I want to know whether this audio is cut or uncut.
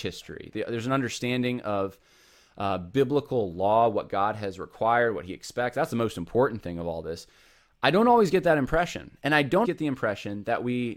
cut